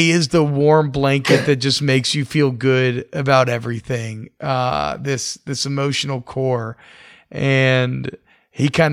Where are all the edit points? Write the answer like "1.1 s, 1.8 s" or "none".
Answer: none